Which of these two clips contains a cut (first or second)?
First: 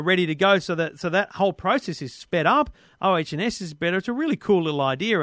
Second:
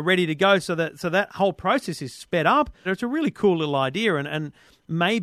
second